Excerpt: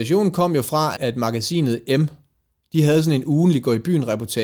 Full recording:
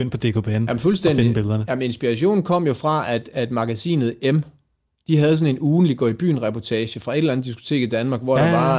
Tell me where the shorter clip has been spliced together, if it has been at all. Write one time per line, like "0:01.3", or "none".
0:01.0